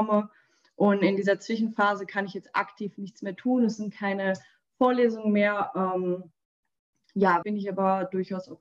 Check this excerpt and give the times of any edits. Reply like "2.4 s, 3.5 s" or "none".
7.4 s